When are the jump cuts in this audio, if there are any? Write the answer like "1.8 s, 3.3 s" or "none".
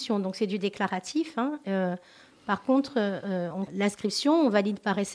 3.7 s